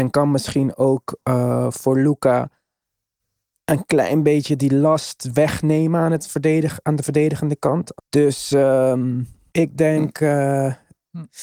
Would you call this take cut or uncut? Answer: cut